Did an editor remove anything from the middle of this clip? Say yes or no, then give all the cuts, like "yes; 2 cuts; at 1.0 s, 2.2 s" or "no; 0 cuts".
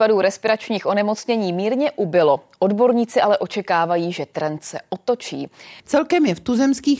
yes; 1 cut; at 5.8 s